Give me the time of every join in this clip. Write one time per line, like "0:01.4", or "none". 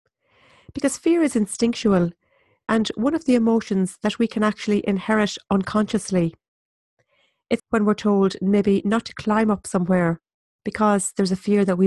0:07.6